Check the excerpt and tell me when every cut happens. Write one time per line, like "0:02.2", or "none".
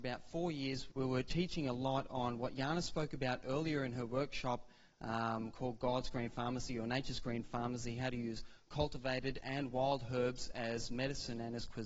0:00.9